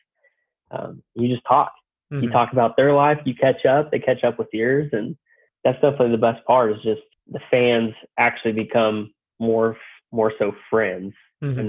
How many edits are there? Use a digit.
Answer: 0